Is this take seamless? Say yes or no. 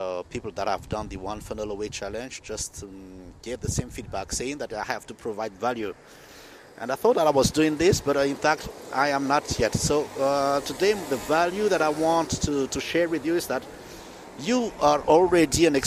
yes